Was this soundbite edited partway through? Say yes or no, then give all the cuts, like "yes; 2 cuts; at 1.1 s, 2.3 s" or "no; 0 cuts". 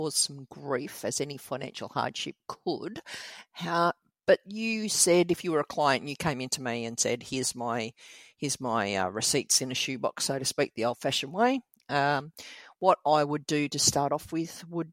no; 0 cuts